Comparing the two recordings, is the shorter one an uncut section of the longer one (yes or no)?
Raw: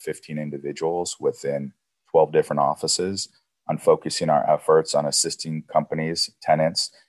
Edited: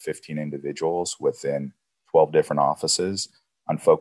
yes